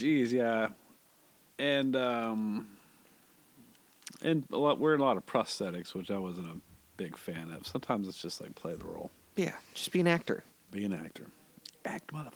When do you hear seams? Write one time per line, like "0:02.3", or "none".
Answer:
none